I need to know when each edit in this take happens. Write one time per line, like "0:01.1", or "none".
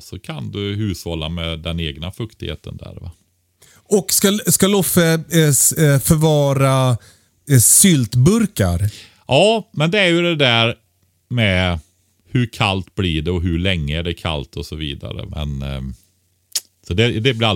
0:15.3